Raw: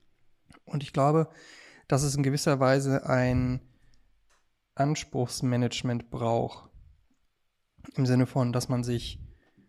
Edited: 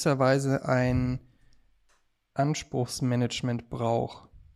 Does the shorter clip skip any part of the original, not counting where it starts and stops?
no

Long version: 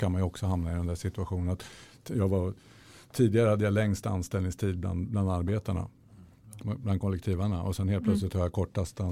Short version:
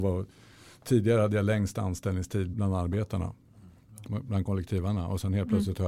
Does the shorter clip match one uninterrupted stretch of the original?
no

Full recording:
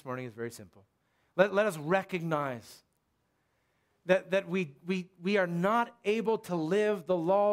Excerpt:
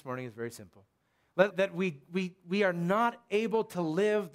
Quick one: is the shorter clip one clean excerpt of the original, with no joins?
no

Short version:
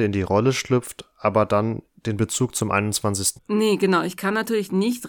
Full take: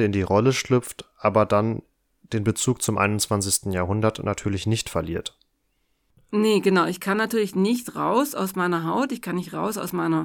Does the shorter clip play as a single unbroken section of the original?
no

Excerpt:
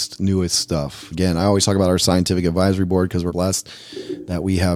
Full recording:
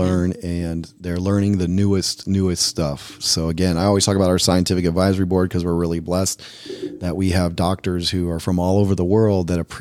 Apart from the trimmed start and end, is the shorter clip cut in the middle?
yes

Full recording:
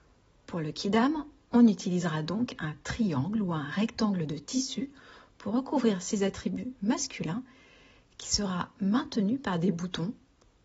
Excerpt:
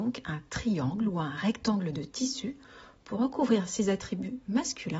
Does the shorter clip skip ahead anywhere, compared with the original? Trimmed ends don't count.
no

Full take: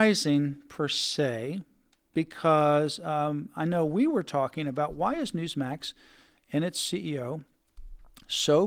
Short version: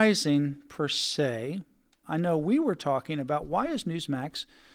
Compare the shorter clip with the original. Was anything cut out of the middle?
yes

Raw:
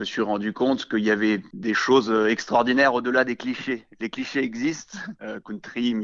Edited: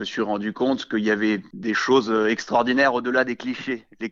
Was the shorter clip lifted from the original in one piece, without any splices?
yes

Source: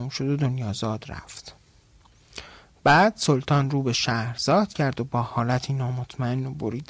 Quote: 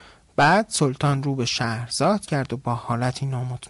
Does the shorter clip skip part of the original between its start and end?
no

